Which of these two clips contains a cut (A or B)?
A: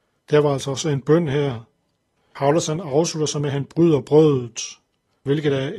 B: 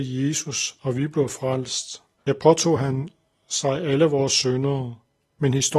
B